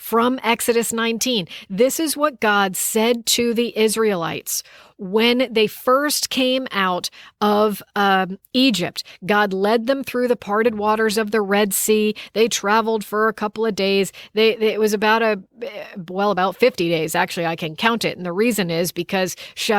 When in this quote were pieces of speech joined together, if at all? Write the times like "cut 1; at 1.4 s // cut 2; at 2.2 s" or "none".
none

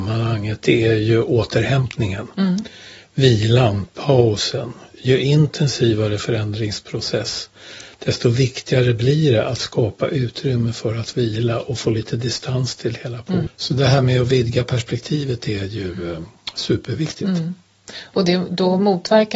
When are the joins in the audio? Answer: cut 1; at 13.5 s

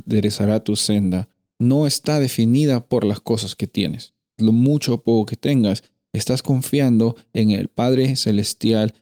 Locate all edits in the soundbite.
cut 1; at 1.6 s // cut 2; at 4.4 s

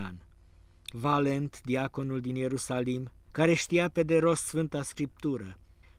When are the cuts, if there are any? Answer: cut 1; at 0.9 s // cut 2; at 3.3 s

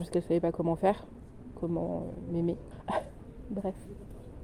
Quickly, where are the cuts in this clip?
cut 1; at 2.7 s

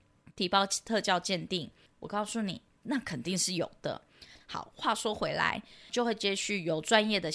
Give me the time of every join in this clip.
cut 1; at 1.9 s // cut 2; at 4.4 s // cut 3; at 5.9 s

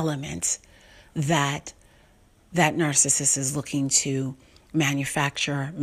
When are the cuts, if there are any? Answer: none

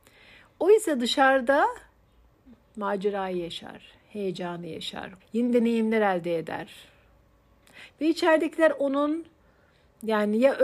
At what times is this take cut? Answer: cut 1; at 5.2 s // cut 2; at 7.9 s

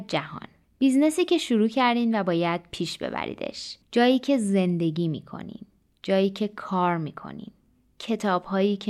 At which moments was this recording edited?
cut 1; at 3.8 s

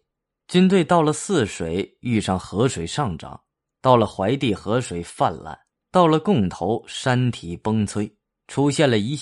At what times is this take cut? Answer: none

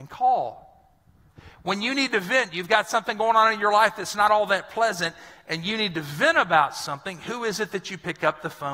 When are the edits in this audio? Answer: none

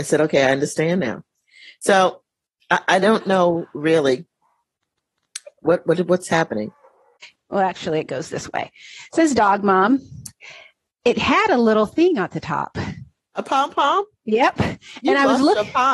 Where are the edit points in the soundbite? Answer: cut 1; at 7.4 s

